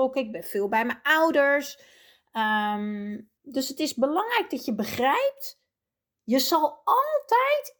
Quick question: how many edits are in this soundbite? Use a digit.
1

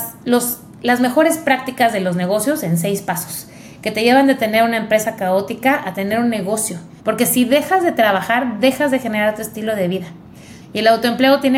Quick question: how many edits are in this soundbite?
2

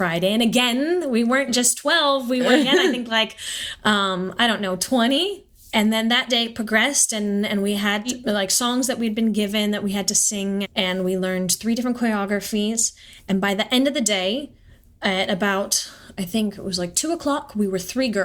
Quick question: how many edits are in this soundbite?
1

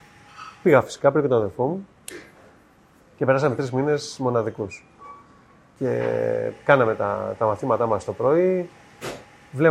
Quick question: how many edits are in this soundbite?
0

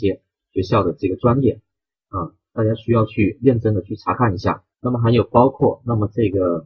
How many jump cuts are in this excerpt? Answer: 1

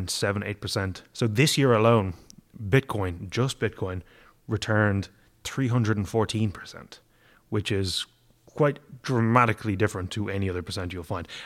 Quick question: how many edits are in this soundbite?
0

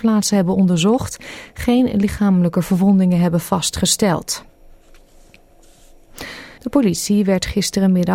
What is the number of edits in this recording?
1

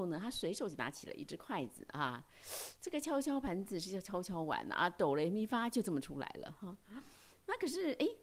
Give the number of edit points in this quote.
0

